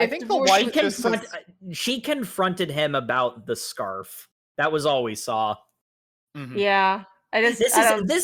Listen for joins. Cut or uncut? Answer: uncut